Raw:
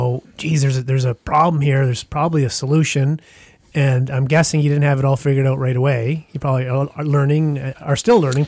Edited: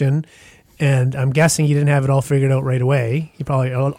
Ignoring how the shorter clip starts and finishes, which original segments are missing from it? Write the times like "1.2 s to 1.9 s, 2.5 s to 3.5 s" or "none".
none